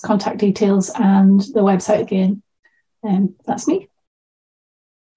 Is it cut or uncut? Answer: uncut